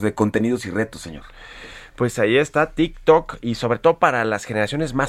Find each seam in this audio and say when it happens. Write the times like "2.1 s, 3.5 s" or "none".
none